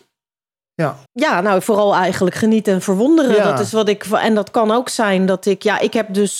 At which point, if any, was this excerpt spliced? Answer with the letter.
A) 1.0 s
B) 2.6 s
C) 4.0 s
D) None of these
A